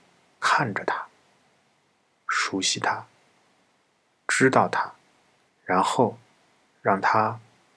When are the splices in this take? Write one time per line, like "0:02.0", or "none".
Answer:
0:05.5